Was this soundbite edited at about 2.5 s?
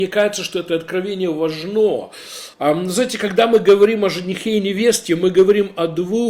yes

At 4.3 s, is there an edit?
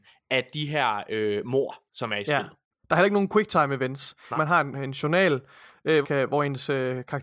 yes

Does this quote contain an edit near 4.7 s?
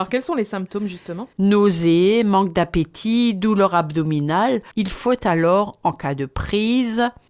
yes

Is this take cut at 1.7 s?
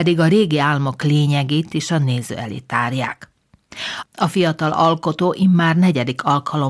no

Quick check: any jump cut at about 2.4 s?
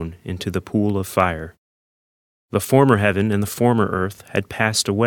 yes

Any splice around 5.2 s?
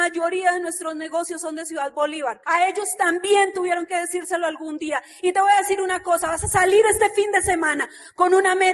no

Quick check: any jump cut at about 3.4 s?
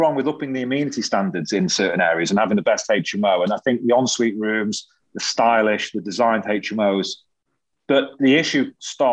no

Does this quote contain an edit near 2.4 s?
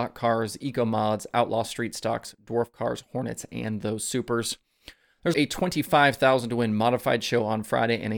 no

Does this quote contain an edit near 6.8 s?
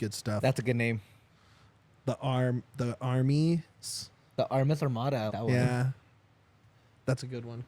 no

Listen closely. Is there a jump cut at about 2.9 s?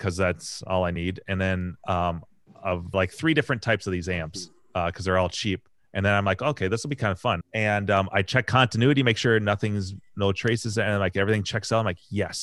yes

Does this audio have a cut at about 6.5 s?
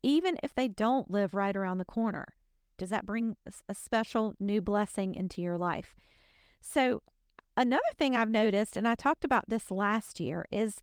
no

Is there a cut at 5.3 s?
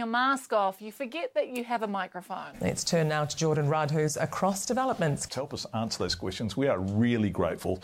yes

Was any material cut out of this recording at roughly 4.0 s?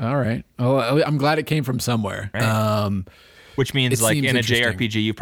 no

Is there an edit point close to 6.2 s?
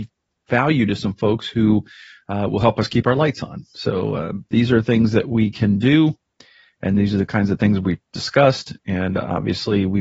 no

